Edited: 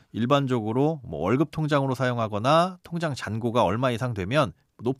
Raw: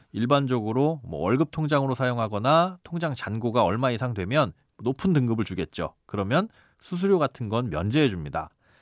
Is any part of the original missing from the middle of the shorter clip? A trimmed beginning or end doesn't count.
no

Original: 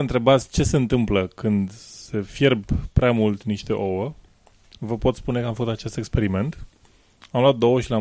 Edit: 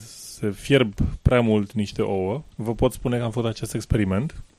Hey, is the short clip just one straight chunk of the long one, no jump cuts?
no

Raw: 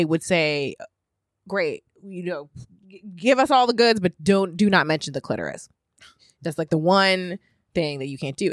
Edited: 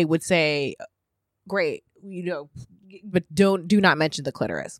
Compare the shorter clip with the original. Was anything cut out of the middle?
yes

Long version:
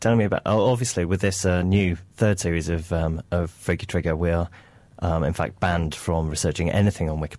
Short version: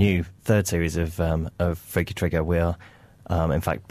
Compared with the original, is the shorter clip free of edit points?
yes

